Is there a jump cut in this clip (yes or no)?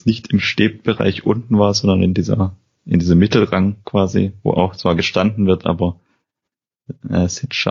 no